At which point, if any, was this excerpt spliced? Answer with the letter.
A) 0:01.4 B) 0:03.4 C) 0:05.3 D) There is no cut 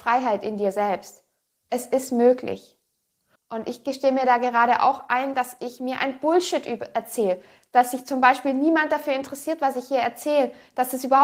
B